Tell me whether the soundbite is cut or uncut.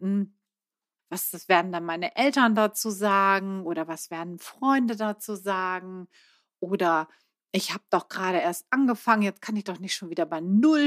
cut